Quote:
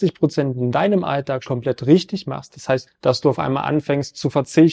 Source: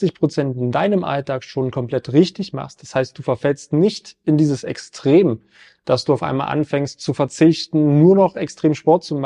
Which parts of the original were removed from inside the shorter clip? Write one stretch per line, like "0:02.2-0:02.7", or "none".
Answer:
0:01.5-0:01.7
0:03.1-0:05.7